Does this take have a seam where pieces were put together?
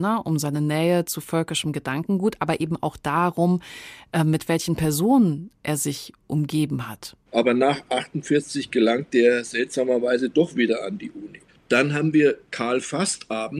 yes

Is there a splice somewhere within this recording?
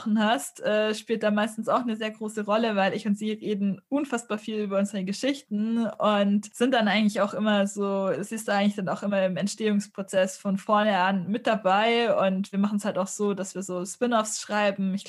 no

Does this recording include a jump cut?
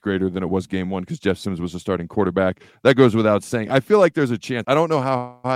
yes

